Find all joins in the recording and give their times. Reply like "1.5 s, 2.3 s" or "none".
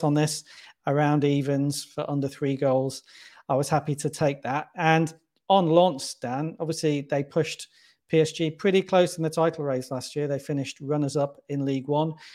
none